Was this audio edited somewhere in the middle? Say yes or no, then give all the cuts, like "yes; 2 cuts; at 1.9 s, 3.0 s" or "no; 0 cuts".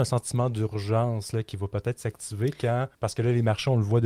yes; 1 cut; at 2.9 s